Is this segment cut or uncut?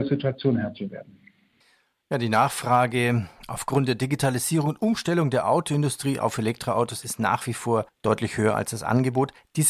uncut